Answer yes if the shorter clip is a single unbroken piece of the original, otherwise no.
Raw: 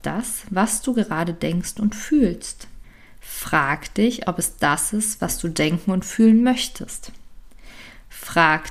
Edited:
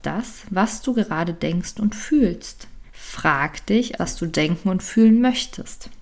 no